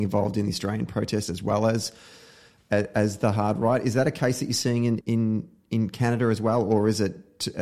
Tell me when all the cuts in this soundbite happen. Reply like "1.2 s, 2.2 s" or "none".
5.0 s